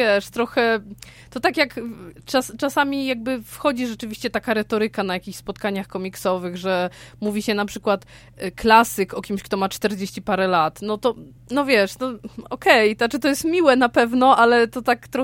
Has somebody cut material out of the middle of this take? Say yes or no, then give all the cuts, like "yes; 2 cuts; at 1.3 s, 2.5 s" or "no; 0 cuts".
no; 0 cuts